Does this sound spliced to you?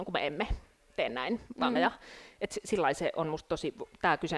yes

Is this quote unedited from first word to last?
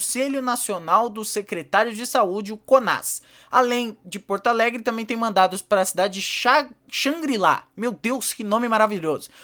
yes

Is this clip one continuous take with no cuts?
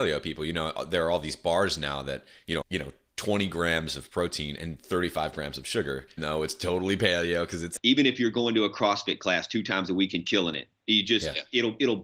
no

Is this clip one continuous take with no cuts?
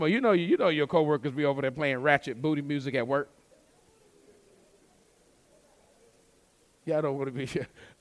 yes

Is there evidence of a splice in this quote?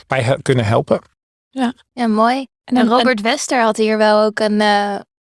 no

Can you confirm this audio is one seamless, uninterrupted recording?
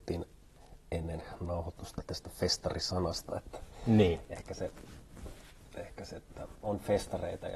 no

